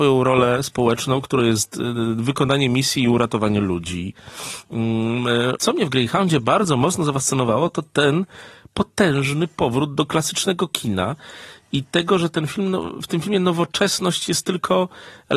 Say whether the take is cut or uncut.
cut